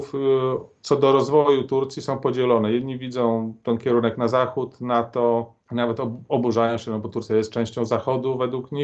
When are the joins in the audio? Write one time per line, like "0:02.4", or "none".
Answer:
0:05.6